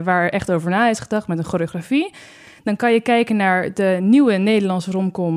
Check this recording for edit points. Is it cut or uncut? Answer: uncut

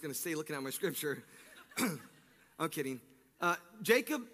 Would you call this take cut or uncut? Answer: uncut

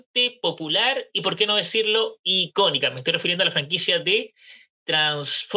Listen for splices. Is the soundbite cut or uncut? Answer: uncut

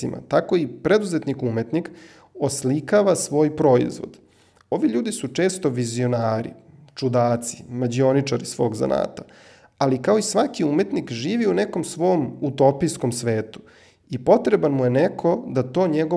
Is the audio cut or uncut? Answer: uncut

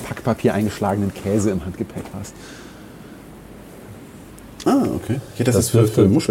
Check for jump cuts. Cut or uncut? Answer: cut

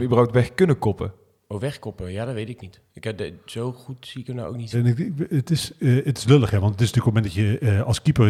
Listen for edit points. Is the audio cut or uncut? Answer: cut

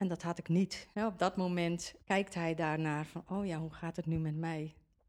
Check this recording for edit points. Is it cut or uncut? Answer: cut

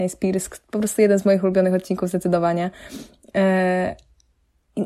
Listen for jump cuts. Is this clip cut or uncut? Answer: uncut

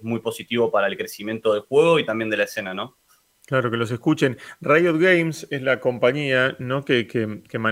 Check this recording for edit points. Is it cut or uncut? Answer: uncut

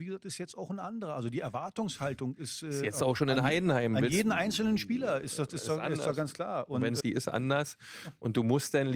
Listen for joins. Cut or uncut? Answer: cut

